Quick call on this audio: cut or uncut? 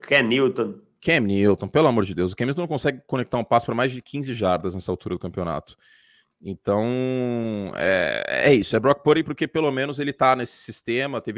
uncut